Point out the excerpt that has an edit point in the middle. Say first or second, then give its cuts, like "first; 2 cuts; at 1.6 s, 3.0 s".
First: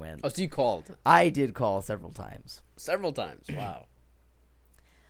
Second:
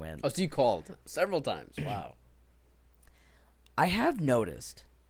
second; 1 cut; at 1.0 s